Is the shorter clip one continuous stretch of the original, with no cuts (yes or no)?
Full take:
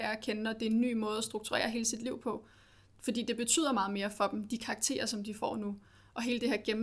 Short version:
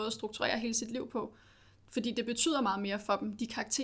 yes